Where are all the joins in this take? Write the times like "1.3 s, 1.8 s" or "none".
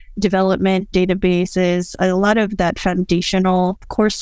0.9 s, 2.0 s